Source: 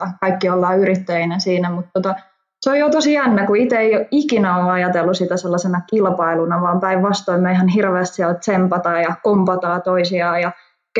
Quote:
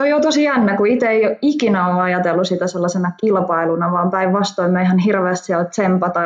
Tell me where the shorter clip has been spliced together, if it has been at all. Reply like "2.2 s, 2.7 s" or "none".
none